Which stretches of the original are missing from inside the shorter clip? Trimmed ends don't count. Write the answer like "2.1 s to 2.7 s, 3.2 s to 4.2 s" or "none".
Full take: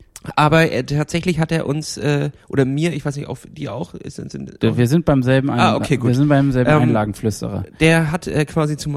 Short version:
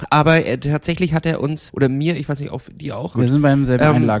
2.0 s to 2.5 s, 3.9 s to 6.0 s